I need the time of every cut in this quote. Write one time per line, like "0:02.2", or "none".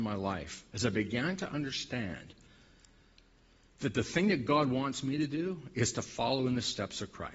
none